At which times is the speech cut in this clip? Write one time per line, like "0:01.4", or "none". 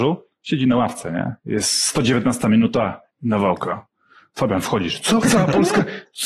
0:03.1
0:05.2